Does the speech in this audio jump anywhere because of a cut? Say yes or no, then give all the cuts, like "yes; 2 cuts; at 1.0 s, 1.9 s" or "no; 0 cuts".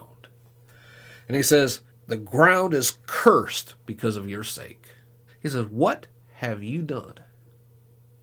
yes; 2 cuts; at 1.9 s, 5.3 s